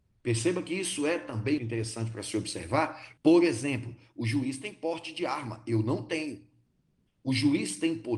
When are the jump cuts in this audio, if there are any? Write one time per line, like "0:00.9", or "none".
0:01.6
0:03.2